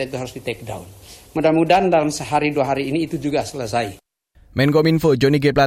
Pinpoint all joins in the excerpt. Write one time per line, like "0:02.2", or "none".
none